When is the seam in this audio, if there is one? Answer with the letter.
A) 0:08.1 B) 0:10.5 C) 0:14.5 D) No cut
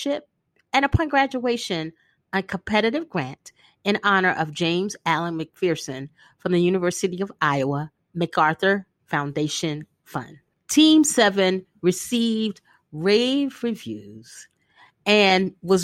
B